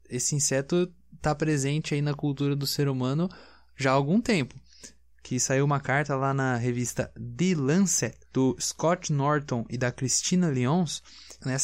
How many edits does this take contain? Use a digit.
2